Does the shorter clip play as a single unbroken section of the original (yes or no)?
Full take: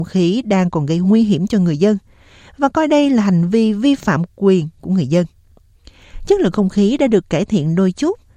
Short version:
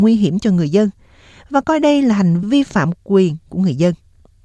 no